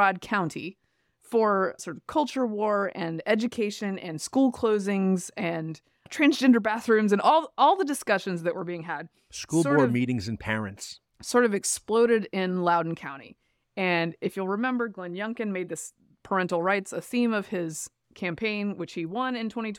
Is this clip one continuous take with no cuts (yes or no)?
yes